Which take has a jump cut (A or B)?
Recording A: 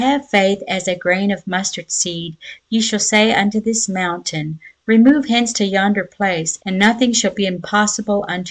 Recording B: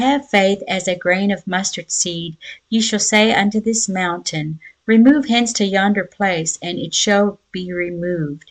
A